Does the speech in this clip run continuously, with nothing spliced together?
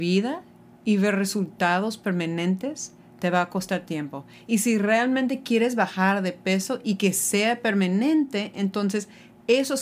yes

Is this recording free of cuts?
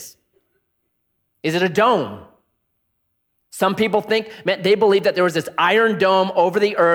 yes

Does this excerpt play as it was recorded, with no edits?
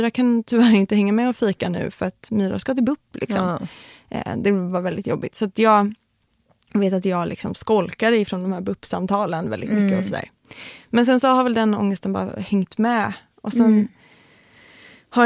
yes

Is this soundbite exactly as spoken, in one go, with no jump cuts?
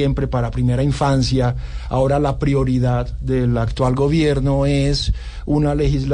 yes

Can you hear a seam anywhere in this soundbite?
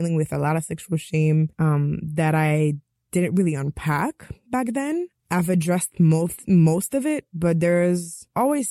no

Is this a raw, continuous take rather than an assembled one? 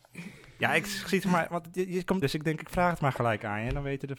no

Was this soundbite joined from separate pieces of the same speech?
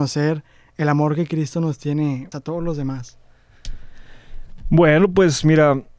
yes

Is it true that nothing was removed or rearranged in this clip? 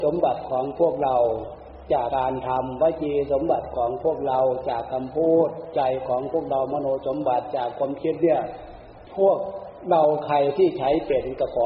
no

